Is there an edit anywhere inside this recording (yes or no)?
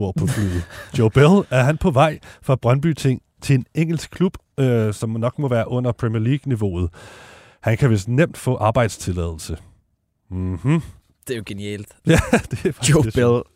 no